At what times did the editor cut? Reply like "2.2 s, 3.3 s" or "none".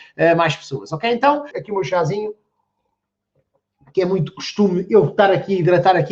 1.5 s